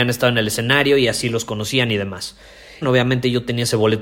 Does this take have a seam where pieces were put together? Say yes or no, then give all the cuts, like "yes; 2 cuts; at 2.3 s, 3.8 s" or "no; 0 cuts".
yes; 1 cut; at 2.8 s